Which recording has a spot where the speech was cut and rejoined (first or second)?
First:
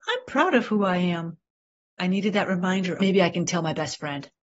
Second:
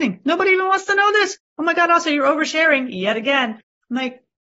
first